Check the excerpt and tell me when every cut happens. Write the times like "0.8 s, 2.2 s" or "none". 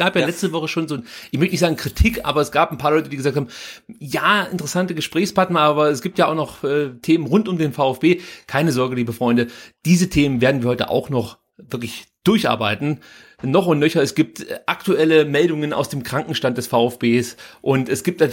none

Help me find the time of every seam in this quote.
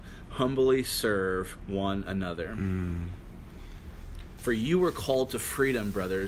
4.4 s

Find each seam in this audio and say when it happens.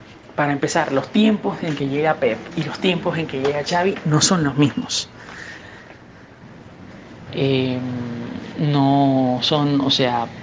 7.3 s

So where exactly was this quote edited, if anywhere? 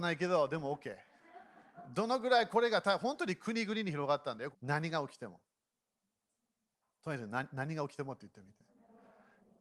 4.5 s

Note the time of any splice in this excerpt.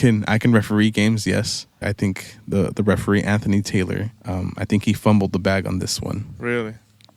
1.8 s, 4.2 s

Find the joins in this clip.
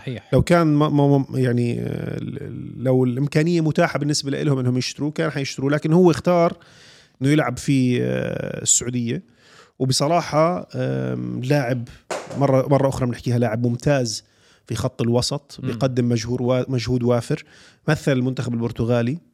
none

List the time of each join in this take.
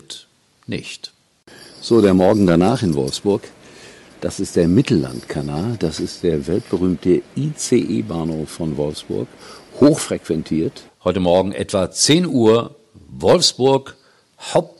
4.1 s, 10.9 s

